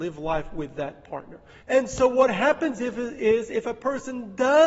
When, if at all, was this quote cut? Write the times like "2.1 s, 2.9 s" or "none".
1.6 s